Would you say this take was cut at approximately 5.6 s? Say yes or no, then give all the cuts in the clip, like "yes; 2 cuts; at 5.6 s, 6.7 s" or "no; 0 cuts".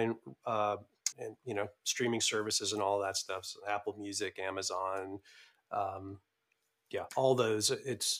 no; 2 cuts; at 1.1 s, 7.1 s